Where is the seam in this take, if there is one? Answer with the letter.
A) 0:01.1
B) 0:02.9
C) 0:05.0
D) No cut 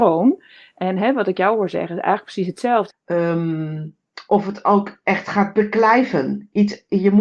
B